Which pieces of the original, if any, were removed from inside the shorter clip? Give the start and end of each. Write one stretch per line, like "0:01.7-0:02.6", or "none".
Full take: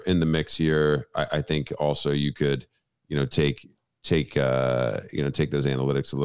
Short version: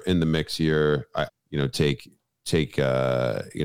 0:01.3-0:02.9

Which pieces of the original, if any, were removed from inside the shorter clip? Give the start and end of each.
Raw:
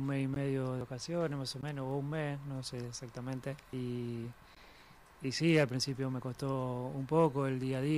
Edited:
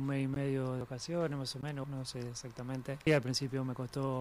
0:01.8-0:02.4
0:03.6-0:05.5

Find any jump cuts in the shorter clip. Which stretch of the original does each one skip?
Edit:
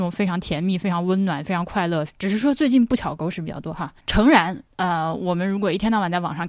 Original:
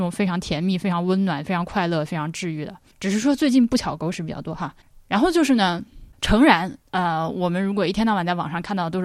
0:02.1-0:02.9
0:04.9-0:06.2

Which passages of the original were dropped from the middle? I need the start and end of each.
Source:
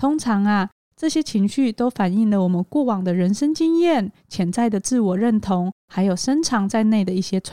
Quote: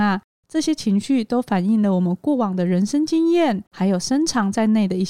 0:04.1-0:05.8

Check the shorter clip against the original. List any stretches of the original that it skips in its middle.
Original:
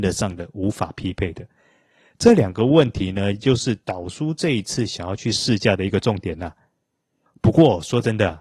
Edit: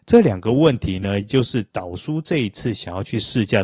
none

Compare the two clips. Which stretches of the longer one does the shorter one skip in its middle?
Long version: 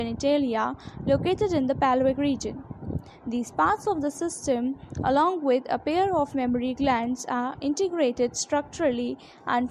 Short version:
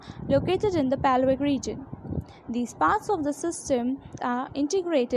0:05.0-0:07.3

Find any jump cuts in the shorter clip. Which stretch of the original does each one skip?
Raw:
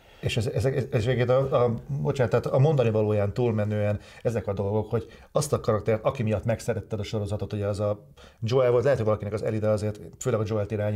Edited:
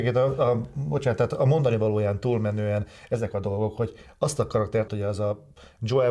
0:06.0-0:07.5

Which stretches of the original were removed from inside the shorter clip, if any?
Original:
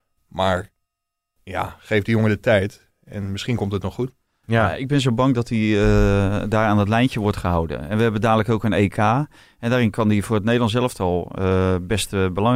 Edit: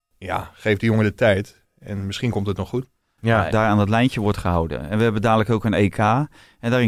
0:04.8-0:06.5

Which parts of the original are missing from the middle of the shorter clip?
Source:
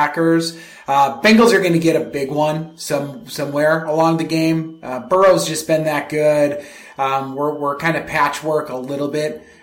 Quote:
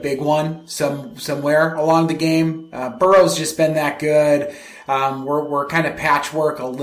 none

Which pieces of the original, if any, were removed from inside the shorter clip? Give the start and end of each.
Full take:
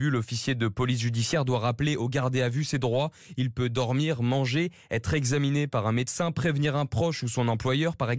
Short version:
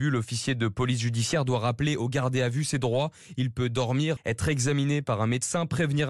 0:04.2-0:04.8

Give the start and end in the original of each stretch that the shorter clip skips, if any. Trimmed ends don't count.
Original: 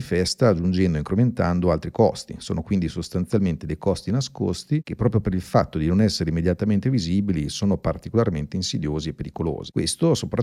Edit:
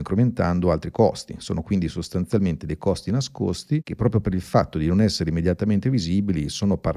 none

